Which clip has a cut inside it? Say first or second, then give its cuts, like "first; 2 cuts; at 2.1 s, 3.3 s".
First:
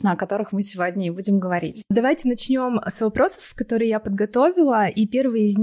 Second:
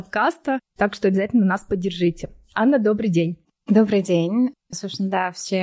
first; 1 cut; at 1.9 s